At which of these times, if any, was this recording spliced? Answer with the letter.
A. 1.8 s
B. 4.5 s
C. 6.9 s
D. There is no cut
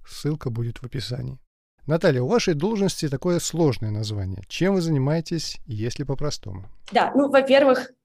A